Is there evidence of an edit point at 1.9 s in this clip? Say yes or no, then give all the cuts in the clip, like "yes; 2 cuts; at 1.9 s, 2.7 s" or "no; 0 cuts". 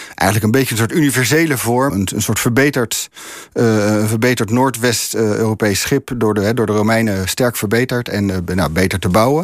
yes; 1 cut; at 1.9 s